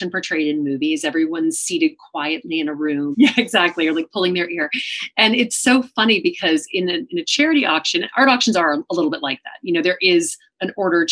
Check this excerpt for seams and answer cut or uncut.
cut